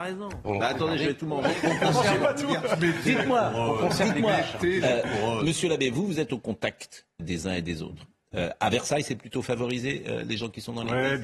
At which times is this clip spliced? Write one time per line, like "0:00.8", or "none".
0:07.2